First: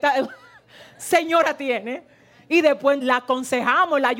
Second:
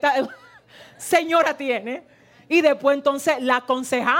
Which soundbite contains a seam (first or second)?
first